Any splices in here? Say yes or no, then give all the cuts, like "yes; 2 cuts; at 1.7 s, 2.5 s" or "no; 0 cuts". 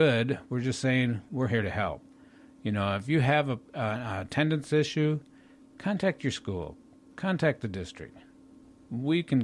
no; 0 cuts